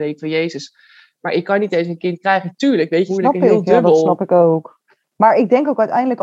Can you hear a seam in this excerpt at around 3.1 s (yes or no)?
yes